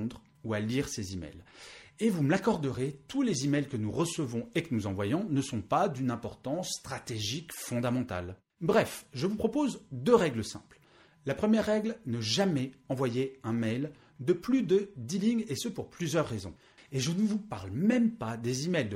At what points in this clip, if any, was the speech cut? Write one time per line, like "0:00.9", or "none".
0:08.5
0:16.8